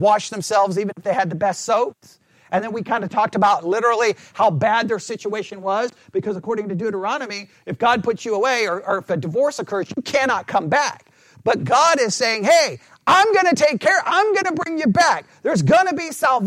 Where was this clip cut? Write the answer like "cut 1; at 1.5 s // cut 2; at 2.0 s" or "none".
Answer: none